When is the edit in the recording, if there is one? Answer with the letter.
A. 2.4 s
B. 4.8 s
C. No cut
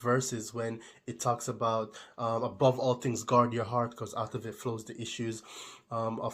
C